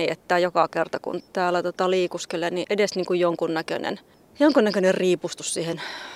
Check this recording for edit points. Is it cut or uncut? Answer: cut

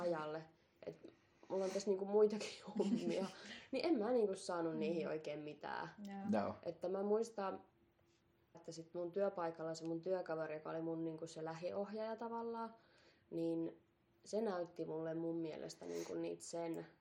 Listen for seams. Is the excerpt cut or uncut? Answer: cut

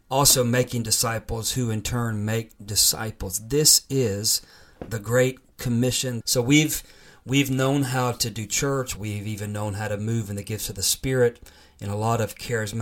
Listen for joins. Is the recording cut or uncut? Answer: cut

